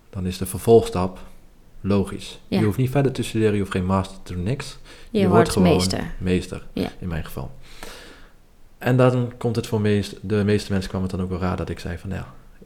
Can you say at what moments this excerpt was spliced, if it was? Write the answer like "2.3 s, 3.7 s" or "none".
none